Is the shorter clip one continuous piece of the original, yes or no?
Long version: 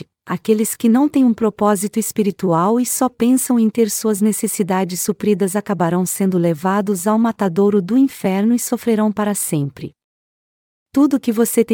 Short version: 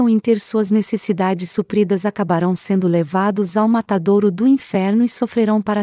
yes